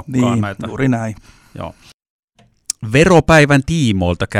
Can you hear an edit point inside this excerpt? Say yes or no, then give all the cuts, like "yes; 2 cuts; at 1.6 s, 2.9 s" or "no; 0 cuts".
no; 0 cuts